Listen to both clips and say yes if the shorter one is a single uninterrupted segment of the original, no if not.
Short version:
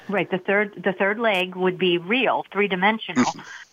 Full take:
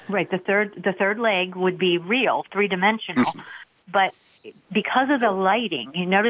yes